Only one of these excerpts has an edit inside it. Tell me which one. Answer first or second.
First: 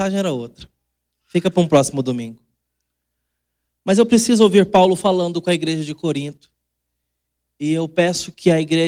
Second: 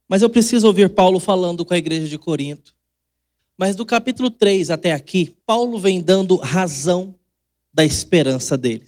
second